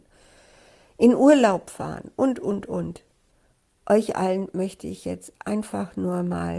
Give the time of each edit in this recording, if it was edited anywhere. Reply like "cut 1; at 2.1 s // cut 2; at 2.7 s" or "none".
none

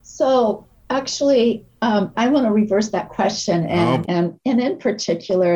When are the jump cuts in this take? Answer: cut 1; at 2.1 s // cut 2; at 4.0 s

